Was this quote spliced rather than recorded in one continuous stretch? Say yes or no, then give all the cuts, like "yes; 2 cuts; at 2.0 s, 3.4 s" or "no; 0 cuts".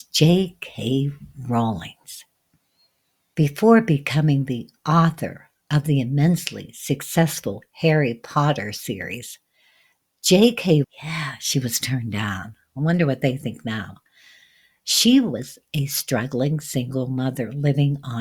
yes; 1 cut; at 10.8 s